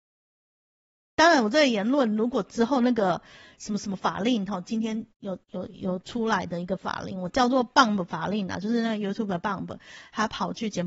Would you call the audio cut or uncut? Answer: uncut